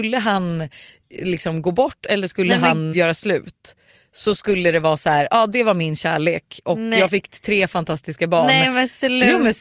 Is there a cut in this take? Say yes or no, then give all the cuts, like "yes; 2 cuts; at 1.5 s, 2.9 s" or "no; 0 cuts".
yes; 1 cut; at 2.9 s